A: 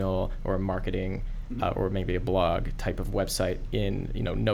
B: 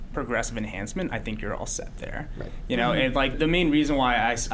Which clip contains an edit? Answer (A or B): B